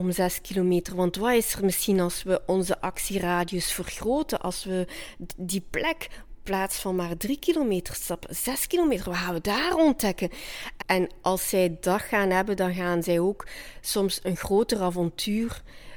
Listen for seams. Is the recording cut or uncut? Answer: cut